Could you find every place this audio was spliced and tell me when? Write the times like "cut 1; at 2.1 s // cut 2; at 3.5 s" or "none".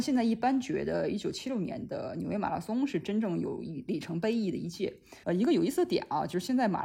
cut 1; at 5.2 s